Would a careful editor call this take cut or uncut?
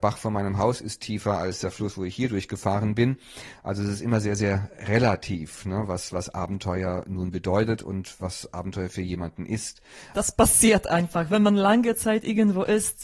cut